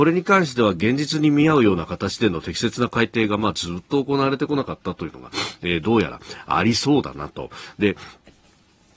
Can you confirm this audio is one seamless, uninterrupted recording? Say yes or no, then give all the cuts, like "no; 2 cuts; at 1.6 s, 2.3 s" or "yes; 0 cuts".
yes; 0 cuts